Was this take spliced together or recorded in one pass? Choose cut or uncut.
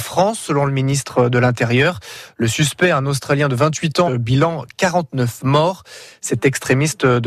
cut